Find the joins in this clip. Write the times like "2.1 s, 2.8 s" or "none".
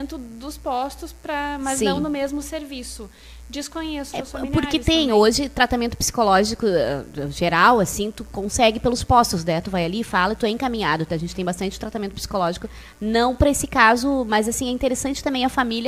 4.1 s